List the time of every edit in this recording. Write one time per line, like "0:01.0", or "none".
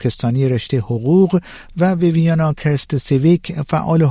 none